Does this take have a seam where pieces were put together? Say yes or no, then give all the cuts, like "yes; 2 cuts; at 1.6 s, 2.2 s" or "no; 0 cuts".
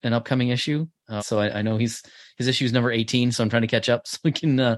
yes; 1 cut; at 1.2 s